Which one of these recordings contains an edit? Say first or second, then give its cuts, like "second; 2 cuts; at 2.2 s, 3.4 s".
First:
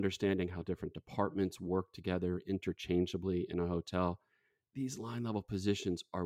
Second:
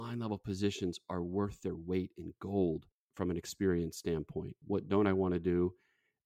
second; 1 cut; at 4.6 s